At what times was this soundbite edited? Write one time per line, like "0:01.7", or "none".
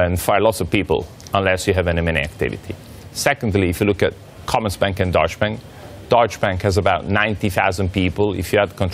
none